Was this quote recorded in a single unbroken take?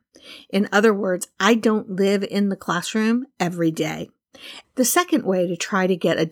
no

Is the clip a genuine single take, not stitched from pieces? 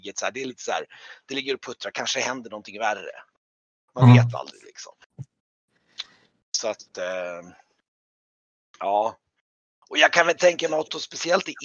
yes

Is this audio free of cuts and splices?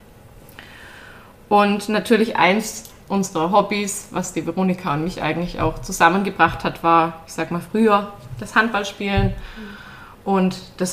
yes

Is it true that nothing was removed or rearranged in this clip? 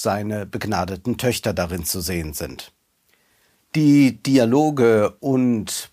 yes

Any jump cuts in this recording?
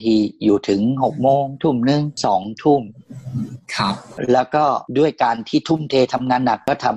no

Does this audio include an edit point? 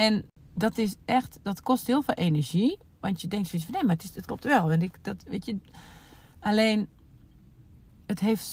no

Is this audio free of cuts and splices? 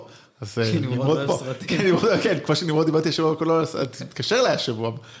yes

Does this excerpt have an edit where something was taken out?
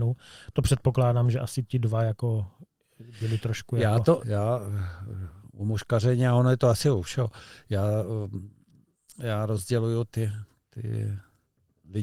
yes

